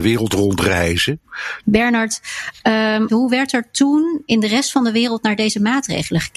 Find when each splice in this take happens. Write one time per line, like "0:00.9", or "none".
0:01.6
0:03.1